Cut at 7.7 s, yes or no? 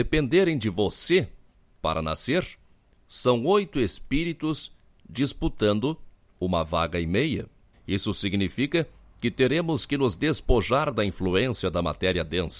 yes